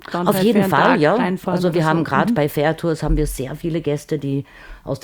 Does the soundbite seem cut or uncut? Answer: uncut